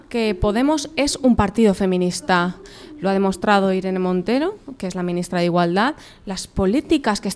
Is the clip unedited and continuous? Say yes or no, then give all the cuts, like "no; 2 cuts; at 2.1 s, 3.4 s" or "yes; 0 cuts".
yes; 0 cuts